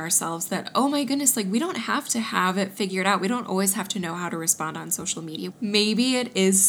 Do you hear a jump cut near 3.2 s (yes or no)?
no